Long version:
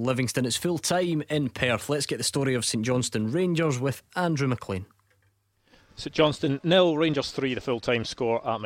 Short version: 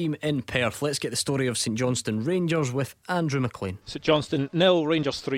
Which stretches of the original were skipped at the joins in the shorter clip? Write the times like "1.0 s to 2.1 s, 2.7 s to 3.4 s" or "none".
4.9 s to 5.9 s